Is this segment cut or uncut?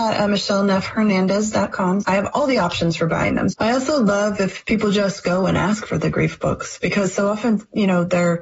cut